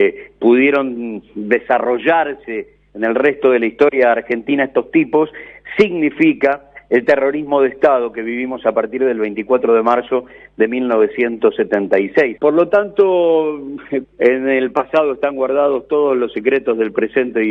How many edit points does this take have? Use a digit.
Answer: 2